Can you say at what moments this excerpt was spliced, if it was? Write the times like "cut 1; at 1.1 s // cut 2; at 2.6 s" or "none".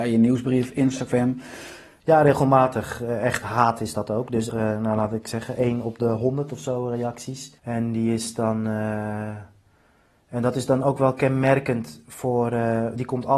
cut 1; at 2.0 s // cut 2; at 4.5 s // cut 3; at 7.6 s